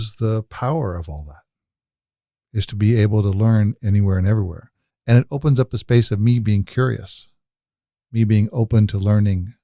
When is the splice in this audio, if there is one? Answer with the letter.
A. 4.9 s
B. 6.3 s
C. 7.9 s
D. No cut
A